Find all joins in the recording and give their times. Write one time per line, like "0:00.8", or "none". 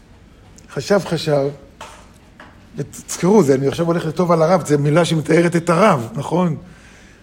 0:01.0